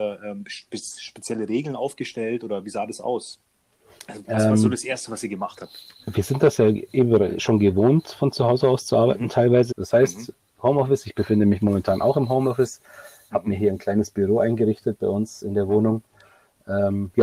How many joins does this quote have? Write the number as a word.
one